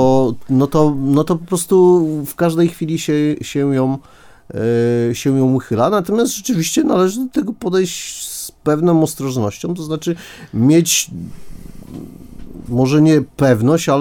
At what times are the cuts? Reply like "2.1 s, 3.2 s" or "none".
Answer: none